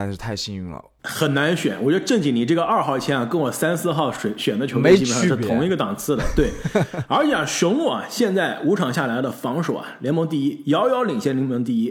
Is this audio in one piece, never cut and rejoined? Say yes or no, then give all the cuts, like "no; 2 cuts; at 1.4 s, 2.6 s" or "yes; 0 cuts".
no; 1 cut; at 1.0 s